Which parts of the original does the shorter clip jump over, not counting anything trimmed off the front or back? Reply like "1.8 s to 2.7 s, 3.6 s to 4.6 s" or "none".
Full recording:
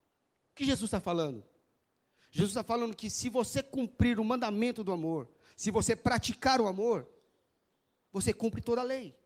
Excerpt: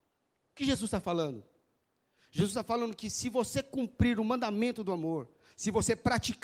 none